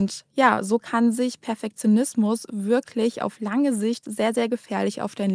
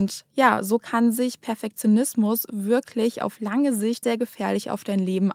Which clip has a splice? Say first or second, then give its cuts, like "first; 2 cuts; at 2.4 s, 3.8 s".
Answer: second; 1 cut; at 4.0 s